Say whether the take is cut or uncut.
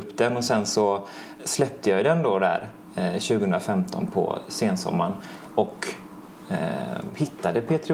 cut